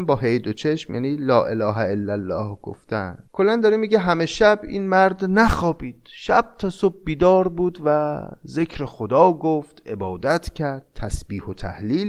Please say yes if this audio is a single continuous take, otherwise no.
no